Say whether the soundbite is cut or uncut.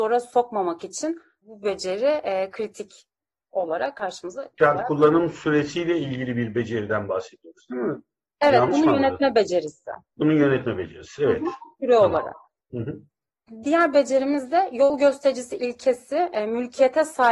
uncut